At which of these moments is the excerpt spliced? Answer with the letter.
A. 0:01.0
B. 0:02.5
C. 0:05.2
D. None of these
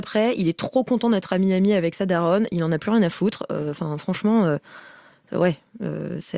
D